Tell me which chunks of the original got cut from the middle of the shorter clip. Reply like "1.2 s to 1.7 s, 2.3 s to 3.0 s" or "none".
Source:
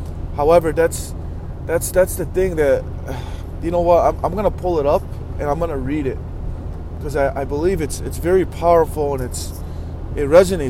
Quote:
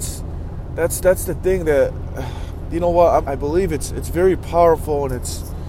4.2 s to 7.3 s